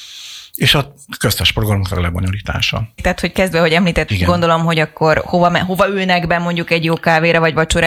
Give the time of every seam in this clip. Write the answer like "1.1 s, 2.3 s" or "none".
3.0 s, 4.1 s